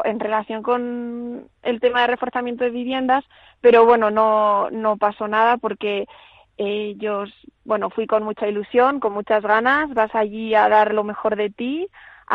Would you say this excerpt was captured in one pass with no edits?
yes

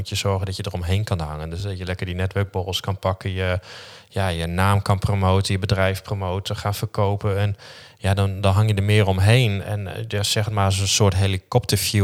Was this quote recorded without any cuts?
yes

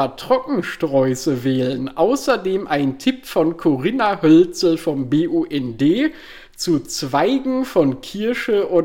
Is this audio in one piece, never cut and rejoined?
no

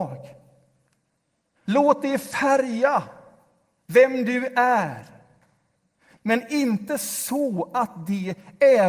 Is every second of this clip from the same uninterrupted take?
no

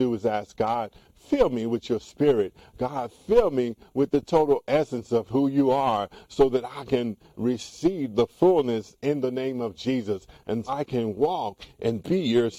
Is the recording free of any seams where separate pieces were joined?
no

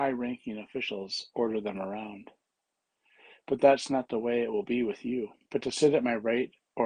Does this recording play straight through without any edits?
no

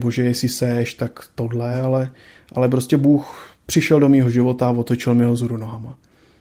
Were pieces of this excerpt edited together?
no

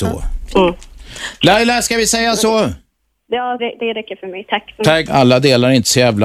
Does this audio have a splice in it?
yes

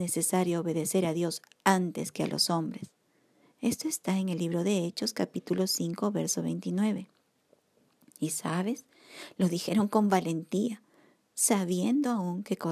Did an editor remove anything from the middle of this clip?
no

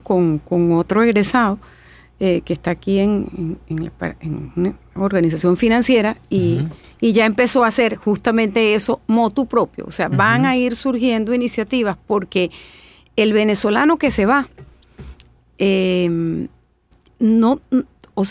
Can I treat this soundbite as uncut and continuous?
yes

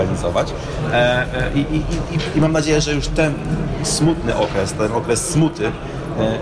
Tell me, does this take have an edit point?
no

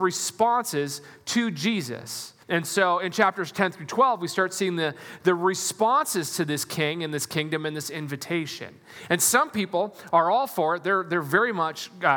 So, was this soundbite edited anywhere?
yes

